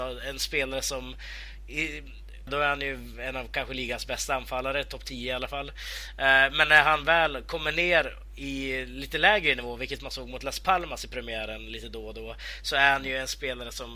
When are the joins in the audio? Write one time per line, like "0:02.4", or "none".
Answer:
0:02.5